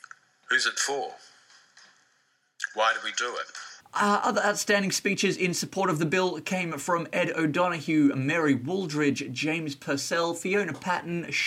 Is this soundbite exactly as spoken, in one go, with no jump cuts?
no; 1 cut; at 3.8 s

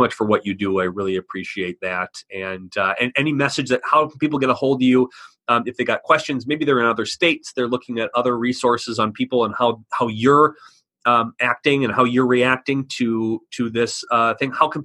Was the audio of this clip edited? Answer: no; 0 cuts

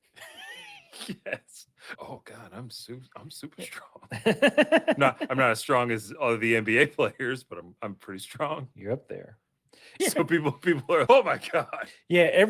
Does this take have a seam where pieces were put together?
yes; 3 cuts; at 2.0 s, 10.0 s, 11.1 s

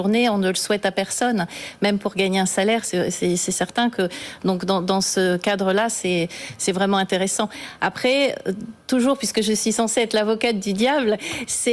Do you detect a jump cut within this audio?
no; 0 cuts

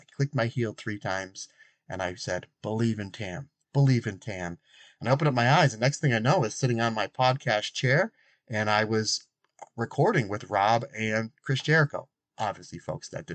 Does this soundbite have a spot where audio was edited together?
yes; 1 cut; at 3.6 s

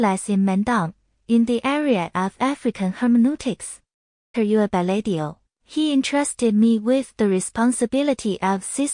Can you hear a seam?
yes; 1 cut; at 4.3 s

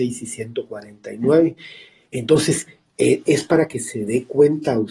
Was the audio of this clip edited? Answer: yes; 1 cut; at 3.2 s

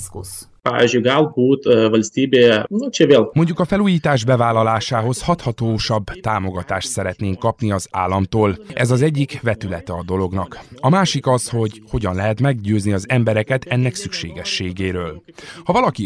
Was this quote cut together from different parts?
yes; 1 cut; at 3.3 s

